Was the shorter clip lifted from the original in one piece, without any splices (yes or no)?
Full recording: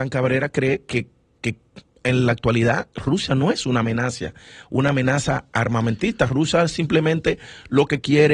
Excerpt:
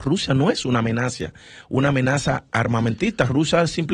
yes